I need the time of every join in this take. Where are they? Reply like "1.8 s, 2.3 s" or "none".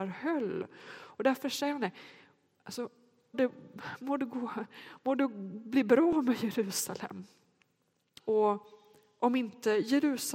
3.3 s, 8.2 s

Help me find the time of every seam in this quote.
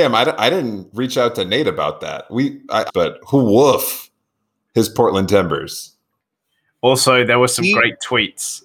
2.9 s

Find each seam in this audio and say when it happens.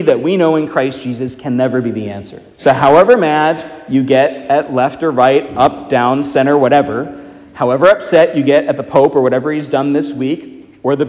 2.5 s

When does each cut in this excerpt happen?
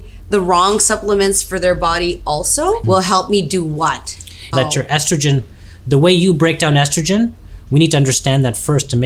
2.8 s, 4.5 s

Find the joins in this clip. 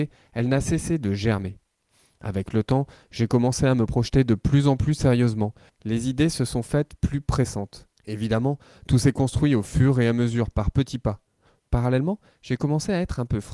8.0 s, 11.6 s

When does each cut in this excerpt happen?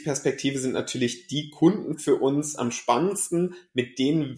none

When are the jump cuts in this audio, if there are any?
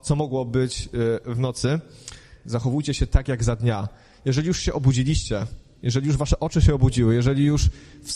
2.5 s

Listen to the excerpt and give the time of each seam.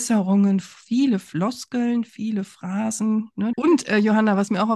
3.5 s

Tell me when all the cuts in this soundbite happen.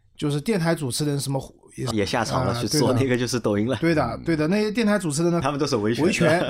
1.9 s, 5.4 s

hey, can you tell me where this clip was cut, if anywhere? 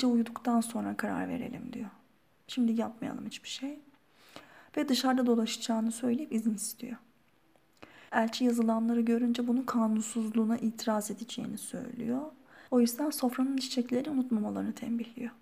8.1 s, 12.7 s

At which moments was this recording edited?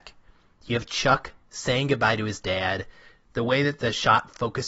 none

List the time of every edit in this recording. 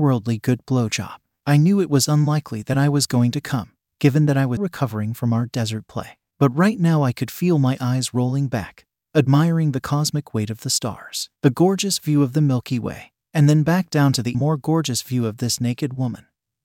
4.6 s, 14.3 s

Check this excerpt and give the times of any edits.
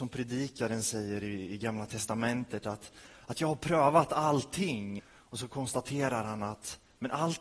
5.0 s

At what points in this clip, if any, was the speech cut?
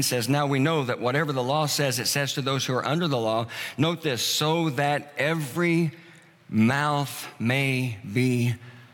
none

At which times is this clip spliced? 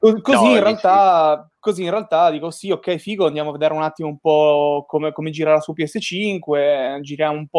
none

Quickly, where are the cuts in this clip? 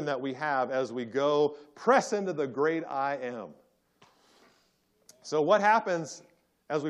none

